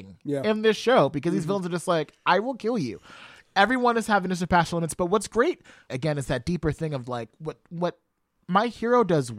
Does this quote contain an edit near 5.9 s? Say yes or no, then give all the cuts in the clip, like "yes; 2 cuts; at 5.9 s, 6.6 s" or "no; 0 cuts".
yes; 1 cut; at 5.9 s